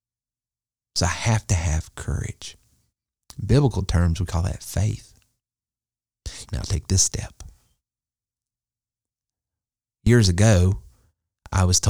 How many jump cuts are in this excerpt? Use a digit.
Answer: 1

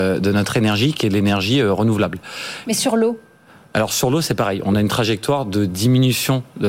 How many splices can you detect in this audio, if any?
1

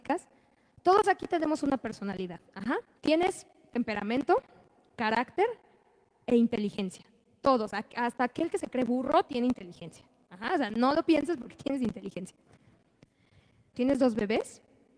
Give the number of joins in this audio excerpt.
2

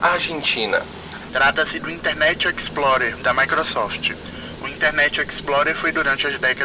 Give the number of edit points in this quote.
2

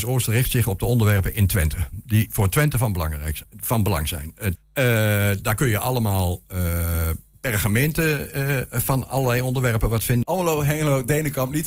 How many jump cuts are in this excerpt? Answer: 2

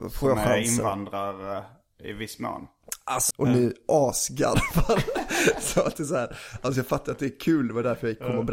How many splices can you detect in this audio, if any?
1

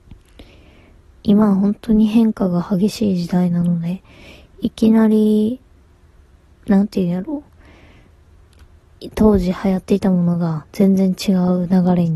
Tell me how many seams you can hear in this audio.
0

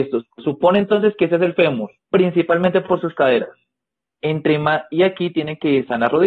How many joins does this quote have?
2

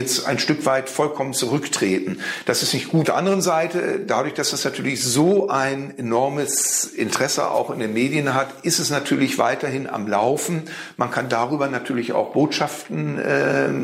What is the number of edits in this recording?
1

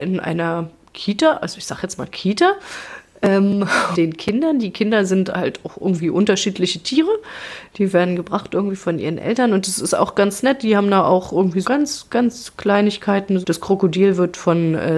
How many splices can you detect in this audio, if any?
3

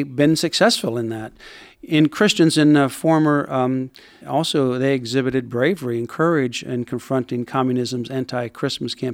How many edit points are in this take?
1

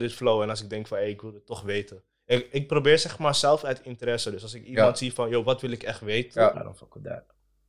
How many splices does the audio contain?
1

